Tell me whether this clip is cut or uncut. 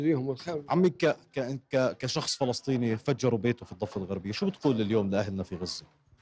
uncut